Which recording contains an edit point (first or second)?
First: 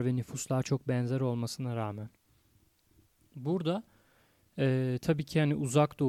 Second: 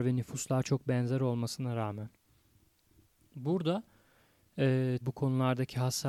second